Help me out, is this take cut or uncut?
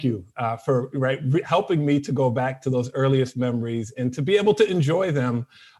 uncut